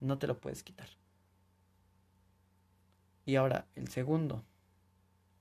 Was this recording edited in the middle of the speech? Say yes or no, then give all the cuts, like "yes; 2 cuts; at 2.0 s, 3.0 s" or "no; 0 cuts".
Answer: no; 0 cuts